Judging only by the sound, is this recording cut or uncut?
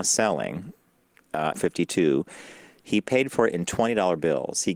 cut